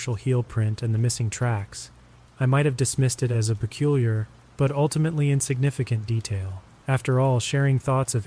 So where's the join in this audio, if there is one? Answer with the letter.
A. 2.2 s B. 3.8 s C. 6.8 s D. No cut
C